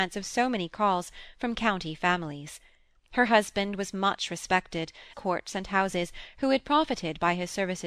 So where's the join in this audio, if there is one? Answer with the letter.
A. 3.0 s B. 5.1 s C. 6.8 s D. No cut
B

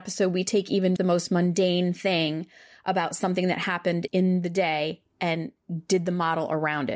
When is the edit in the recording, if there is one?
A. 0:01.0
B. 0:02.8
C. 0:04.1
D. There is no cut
A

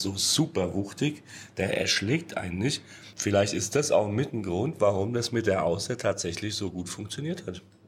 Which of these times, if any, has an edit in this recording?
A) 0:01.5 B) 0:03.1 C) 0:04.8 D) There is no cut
D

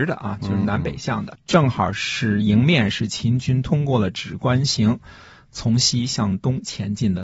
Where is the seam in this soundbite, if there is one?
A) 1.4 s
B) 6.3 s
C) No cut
A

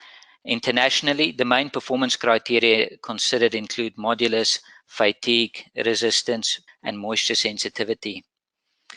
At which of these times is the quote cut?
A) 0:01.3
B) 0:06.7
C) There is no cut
B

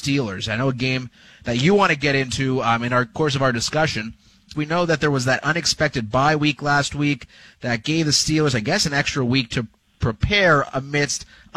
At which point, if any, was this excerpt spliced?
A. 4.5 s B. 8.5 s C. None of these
A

